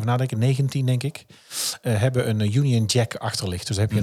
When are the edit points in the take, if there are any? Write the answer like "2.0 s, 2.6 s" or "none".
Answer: none